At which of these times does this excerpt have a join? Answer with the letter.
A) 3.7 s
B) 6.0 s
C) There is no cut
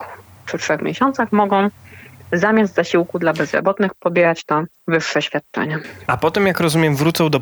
C